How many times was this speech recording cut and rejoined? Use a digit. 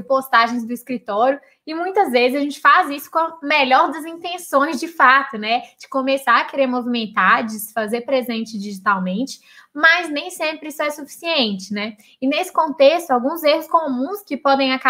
0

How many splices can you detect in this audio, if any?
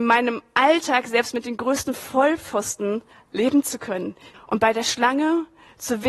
1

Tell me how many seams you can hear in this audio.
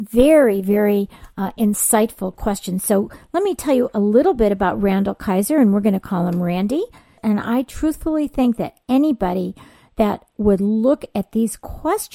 1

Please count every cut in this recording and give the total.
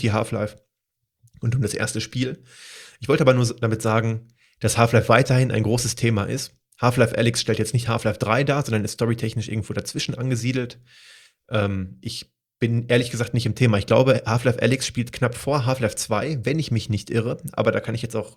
0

